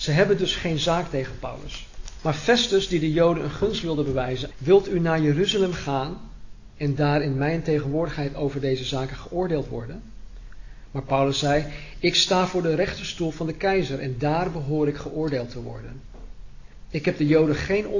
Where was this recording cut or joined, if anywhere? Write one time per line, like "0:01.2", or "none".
0:02.2
0:04.5